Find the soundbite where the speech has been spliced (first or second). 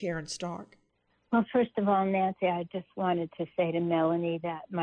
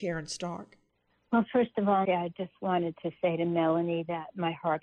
second